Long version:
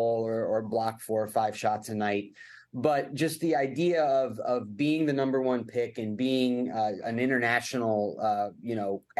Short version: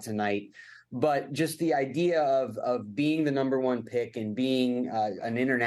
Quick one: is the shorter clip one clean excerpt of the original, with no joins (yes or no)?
yes